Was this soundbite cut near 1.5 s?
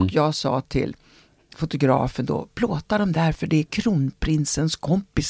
yes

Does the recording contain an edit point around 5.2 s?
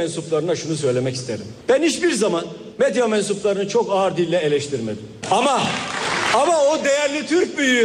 yes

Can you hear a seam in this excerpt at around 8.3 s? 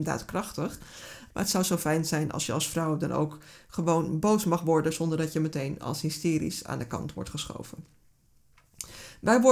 no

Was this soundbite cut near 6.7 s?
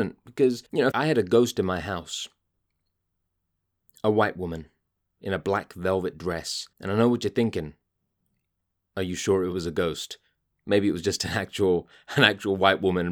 yes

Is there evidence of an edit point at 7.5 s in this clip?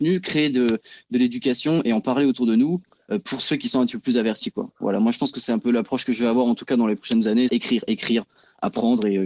yes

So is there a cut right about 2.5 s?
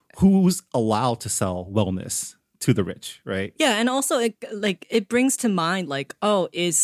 no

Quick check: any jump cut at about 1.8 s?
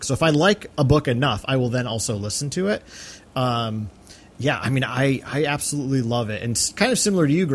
no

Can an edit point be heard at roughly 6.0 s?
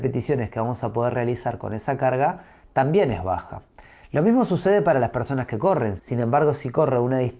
yes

